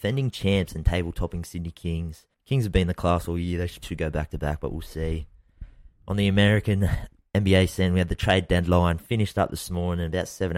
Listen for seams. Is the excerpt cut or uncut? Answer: cut